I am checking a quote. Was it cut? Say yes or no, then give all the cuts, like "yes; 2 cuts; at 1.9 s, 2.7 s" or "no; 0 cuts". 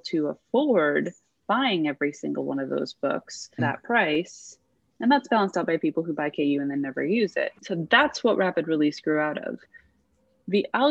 yes; 2 cuts; at 3.6 s, 7.6 s